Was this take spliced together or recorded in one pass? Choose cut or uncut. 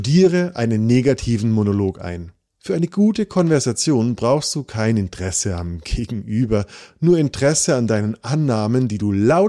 cut